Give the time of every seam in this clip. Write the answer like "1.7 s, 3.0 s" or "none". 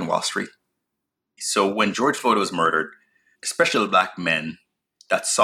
1.4 s, 3.3 s

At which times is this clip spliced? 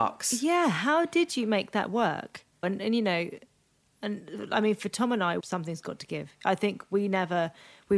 2.6 s, 5.4 s

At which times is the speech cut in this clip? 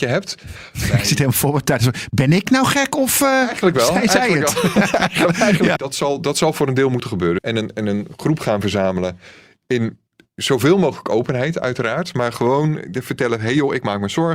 5.8 s, 7.4 s

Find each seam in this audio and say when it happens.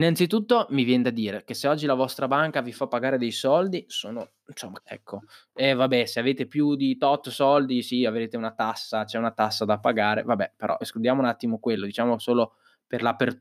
4.8 s, 10.8 s

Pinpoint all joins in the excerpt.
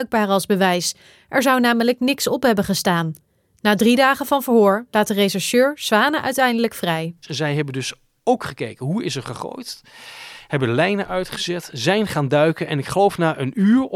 7.2 s

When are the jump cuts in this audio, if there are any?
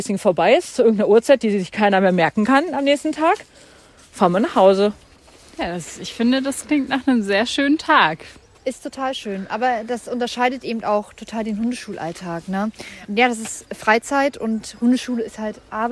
none

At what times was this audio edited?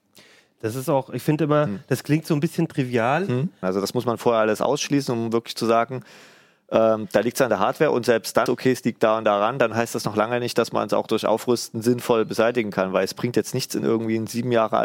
3.6 s, 8.5 s

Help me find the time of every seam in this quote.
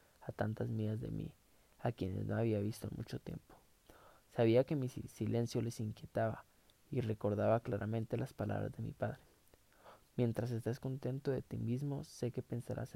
none

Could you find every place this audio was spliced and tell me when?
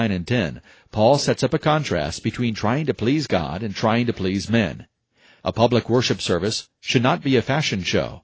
none

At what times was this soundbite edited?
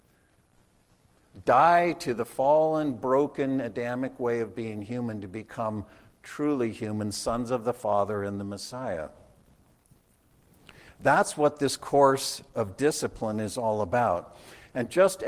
none

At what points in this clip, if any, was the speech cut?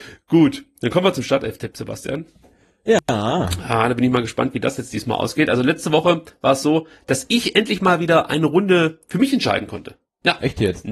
none

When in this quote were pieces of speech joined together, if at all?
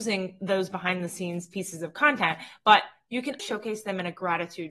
3.4 s

